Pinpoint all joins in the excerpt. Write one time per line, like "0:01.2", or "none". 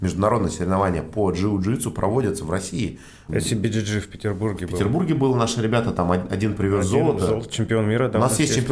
0:03.3